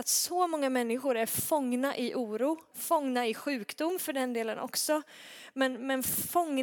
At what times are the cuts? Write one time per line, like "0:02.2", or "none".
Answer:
0:02.7